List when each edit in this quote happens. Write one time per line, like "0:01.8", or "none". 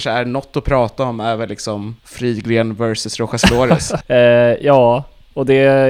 0:02.0
0:04.0